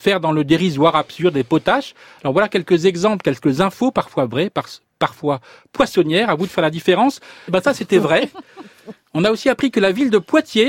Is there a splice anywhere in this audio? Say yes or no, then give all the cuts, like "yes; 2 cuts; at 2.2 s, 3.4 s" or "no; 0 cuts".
yes; 1 cut; at 7.5 s